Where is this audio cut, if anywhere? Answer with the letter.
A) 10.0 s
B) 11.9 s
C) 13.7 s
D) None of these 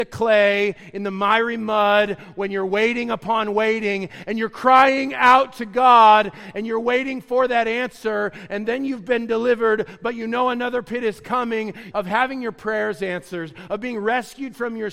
B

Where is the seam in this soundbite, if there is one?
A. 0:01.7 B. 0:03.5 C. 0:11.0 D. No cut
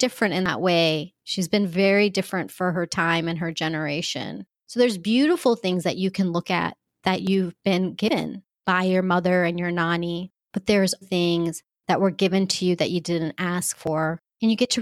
C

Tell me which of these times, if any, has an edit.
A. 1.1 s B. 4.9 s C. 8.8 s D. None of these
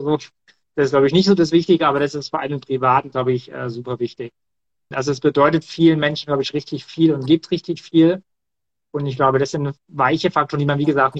B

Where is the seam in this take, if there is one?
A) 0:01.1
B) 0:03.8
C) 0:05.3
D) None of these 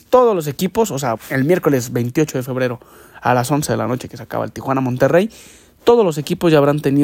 A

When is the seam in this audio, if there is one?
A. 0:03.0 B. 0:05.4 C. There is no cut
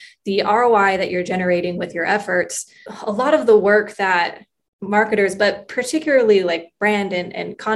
C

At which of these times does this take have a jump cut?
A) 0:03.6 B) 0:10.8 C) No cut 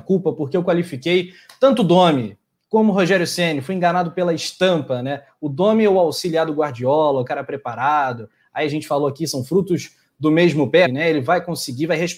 B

